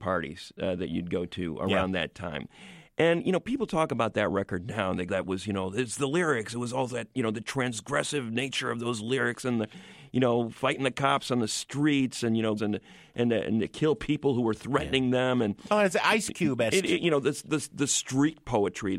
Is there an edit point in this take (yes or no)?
yes